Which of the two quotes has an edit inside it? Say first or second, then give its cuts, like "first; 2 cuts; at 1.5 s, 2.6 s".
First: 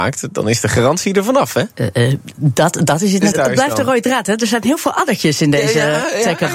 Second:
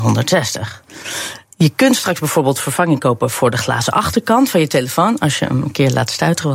first; 2 cuts; at 1.7 s, 3.3 s